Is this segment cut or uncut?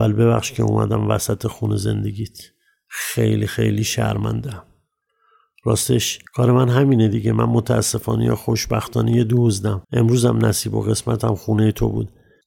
cut